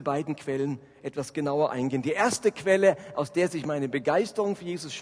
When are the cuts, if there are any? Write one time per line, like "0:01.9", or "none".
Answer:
none